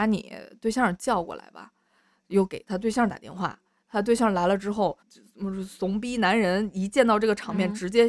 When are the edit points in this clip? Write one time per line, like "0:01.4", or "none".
0:05.0